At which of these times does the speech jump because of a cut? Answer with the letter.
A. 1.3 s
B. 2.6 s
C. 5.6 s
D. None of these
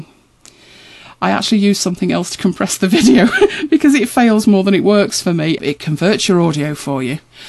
C